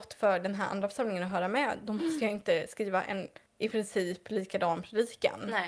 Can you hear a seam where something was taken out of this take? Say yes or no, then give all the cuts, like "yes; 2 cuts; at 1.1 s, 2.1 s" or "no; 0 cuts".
yes; 1 cut; at 3.5 s